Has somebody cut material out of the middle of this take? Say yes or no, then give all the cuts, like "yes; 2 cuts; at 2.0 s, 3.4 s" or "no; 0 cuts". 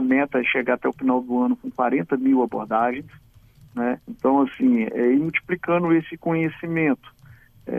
yes; 1 cut; at 4.0 s